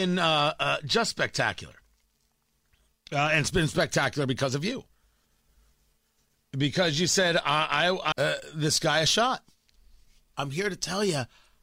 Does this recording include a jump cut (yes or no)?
yes